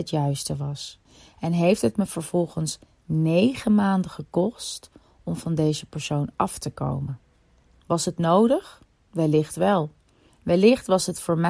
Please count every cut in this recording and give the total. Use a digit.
1